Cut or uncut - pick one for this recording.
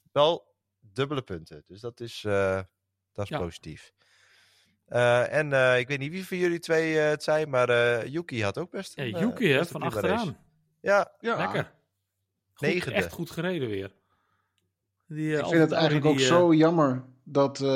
uncut